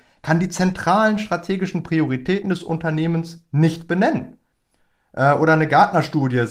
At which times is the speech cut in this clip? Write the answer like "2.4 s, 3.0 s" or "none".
none